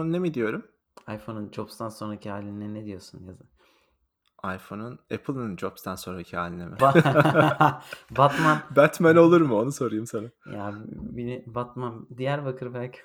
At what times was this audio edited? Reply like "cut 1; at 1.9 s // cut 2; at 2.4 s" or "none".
cut 1; at 6.8 s